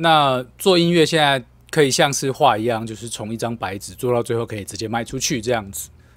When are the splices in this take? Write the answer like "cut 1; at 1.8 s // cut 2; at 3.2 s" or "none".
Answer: cut 1; at 2.3 s